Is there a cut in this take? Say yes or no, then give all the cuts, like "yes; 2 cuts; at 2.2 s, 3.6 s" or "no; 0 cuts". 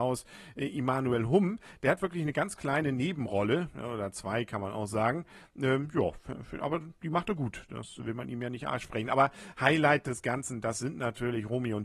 no; 0 cuts